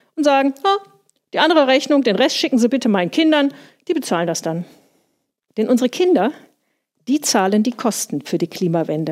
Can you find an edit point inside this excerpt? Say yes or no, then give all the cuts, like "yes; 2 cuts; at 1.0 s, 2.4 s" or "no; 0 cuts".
yes; 1 cut; at 5.5 s